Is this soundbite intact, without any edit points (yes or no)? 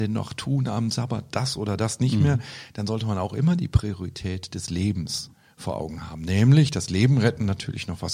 yes